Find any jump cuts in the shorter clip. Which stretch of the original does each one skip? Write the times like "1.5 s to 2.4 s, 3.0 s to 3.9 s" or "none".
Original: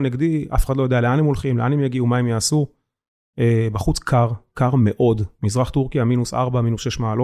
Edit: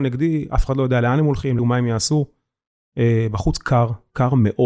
1.6 s to 2.0 s